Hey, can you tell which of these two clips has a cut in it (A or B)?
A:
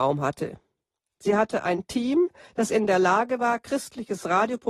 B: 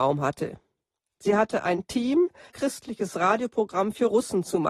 B